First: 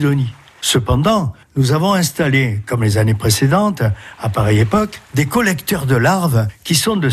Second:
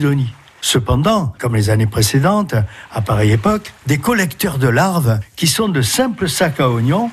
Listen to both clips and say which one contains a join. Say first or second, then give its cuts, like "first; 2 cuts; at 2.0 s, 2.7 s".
second; 1 cut; at 1.4 s